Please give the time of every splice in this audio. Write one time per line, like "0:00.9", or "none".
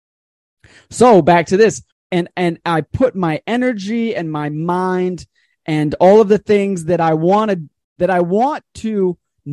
0:01.9

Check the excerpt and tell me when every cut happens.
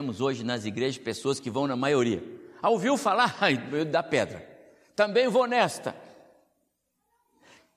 none

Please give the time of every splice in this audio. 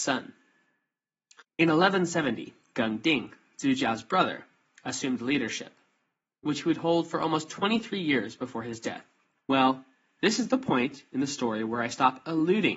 0:01.4
0:09.4

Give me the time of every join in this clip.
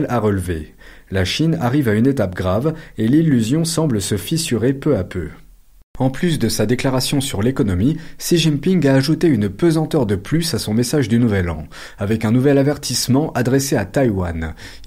none

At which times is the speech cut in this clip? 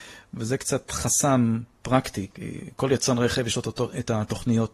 0:02.3

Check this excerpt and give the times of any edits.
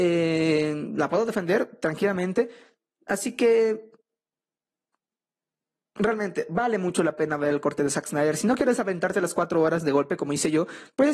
none

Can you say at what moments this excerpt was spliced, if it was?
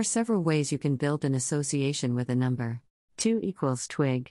0:03.1

